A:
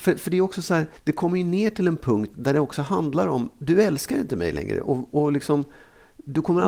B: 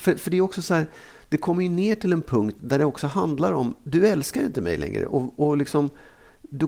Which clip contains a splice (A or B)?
A